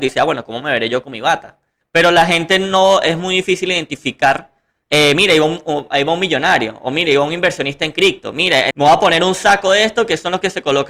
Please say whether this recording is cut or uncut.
cut